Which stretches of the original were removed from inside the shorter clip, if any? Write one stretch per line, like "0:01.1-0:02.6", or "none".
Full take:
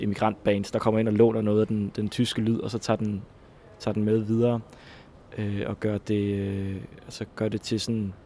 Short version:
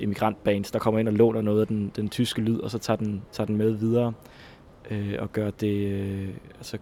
0:03.3-0:03.7

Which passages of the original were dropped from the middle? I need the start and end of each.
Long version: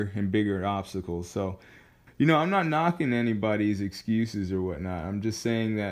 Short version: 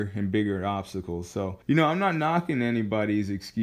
0:01.6-0:02.1

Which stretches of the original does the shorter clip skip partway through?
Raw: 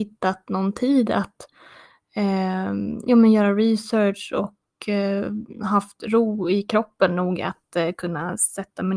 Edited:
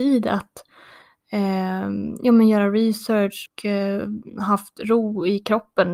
0:04.3-0:04.7

